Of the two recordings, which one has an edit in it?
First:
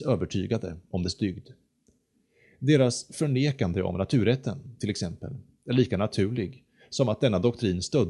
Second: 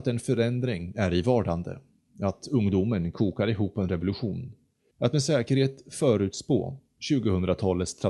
second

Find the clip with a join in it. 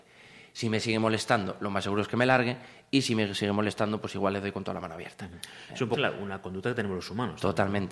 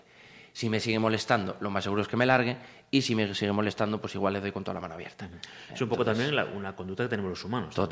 first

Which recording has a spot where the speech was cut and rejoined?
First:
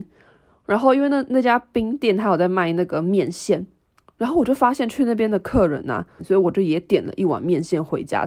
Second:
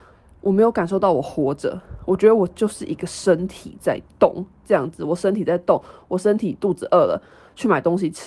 first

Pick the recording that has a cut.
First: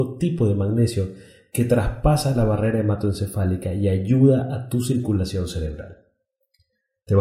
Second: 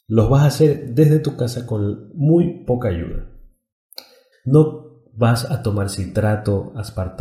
second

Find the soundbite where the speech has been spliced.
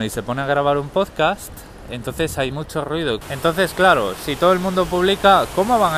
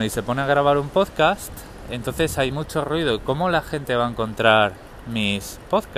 first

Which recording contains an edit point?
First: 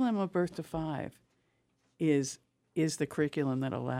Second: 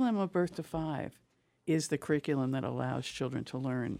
second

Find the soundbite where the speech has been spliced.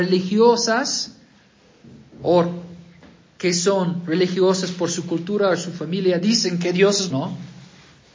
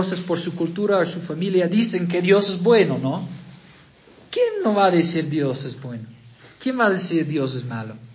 first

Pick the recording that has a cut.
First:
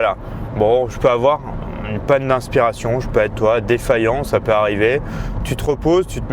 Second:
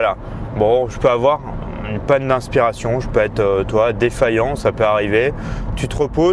first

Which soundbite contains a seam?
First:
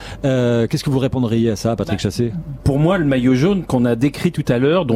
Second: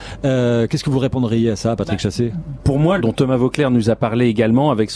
second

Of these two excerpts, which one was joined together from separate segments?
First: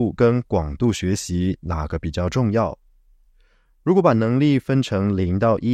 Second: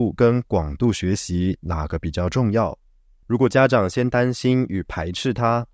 second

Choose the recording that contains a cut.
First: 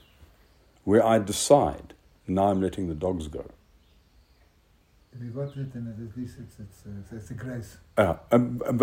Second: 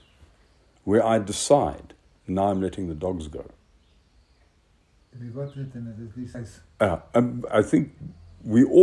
second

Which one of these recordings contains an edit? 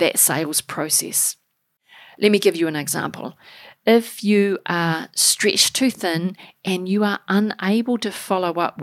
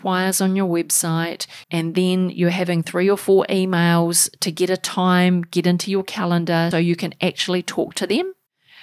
second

